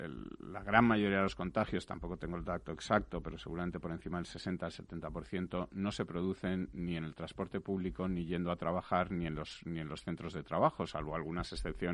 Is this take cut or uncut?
uncut